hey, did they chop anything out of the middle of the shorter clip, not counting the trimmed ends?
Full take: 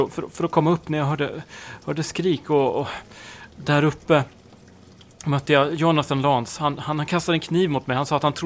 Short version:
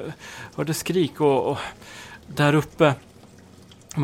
no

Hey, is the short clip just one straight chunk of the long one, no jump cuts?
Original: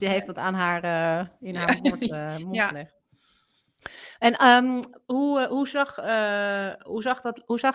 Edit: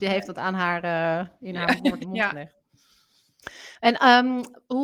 no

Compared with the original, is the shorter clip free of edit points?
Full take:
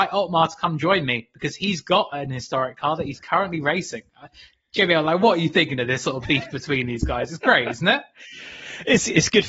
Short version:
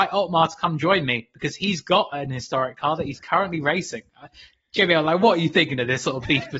yes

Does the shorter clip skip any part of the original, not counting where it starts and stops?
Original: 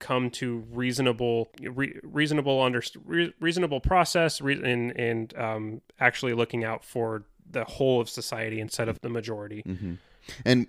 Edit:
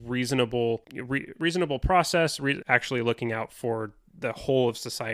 yes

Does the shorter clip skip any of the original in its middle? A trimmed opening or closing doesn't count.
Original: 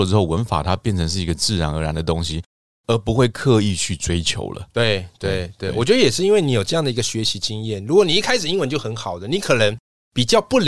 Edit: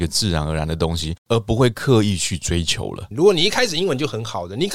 yes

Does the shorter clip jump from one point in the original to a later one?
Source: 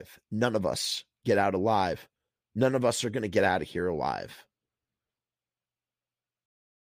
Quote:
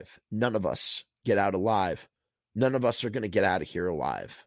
no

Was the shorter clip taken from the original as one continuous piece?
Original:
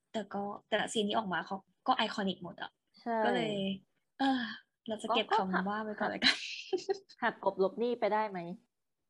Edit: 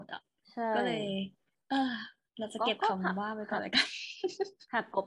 yes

